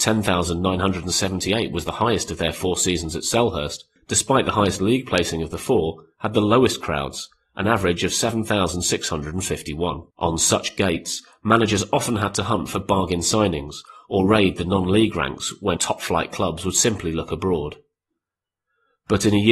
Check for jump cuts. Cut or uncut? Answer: cut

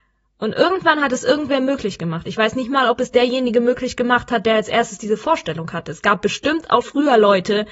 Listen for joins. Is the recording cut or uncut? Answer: cut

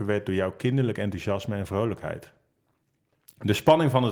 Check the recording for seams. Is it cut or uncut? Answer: uncut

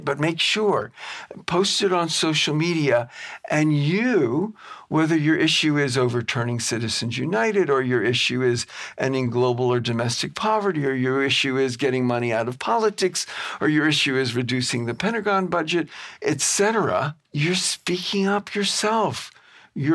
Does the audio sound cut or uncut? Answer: cut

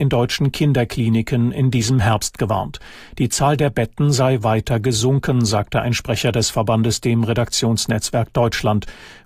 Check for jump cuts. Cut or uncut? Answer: uncut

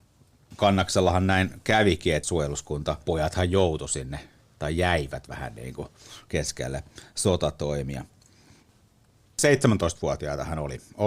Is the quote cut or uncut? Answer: uncut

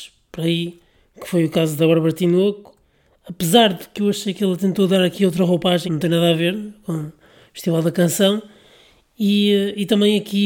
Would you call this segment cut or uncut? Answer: cut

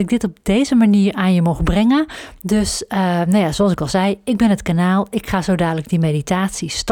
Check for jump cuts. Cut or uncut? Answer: uncut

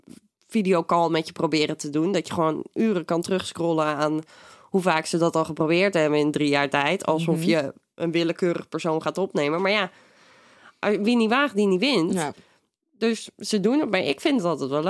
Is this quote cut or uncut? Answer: uncut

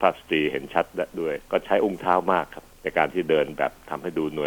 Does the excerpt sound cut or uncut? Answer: cut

